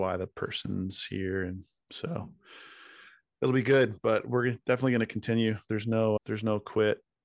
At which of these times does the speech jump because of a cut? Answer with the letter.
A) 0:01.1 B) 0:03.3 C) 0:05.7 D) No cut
D